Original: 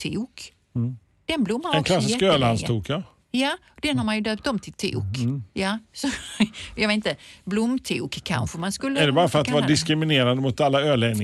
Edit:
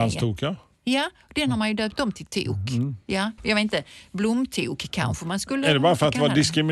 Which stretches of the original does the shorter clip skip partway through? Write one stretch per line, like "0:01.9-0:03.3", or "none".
0:05.8-0:06.7